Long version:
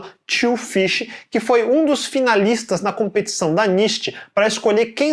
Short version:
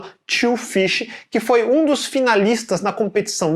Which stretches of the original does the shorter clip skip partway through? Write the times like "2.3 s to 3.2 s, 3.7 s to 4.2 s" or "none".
none